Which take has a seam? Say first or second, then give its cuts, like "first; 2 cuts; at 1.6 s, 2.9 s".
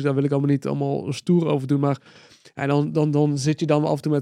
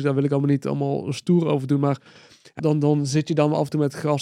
second; 1 cut; at 2.6 s